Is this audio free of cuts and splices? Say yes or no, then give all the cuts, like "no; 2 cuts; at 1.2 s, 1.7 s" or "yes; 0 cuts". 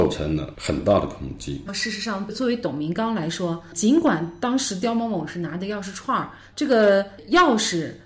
no; 2 cuts; at 1.7 s, 6.5 s